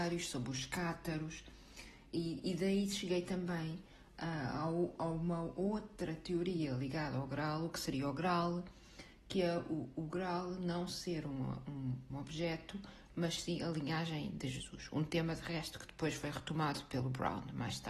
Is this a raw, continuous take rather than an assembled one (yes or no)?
no